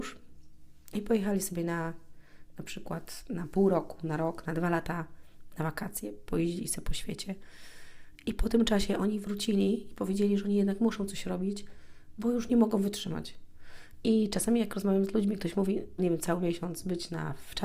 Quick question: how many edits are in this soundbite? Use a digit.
2